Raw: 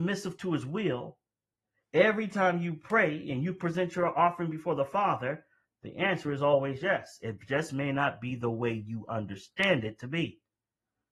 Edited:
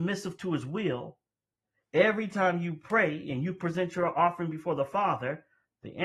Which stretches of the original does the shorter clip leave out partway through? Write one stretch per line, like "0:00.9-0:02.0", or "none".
none